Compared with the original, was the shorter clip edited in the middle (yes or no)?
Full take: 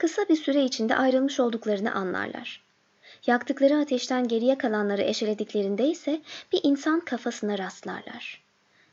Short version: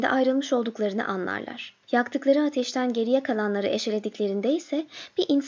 yes